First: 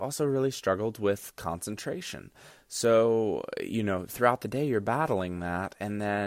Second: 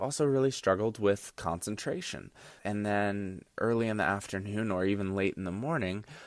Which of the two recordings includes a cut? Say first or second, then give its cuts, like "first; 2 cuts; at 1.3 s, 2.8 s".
second; 1 cut; at 2.6 s